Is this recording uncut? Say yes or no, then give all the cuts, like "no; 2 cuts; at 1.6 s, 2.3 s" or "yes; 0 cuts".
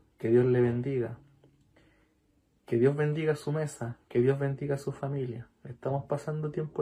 yes; 0 cuts